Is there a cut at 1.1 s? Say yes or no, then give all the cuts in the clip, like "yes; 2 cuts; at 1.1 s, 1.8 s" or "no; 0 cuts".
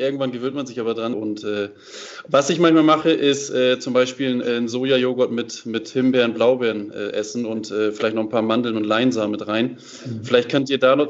yes; 1 cut; at 1.1 s